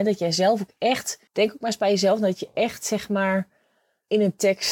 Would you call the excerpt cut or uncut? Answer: cut